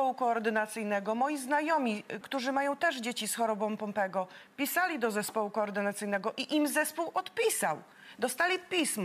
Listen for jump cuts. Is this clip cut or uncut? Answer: cut